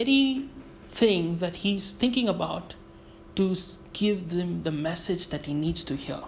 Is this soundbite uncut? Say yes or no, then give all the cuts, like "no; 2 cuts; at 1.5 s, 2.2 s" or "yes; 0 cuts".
yes; 0 cuts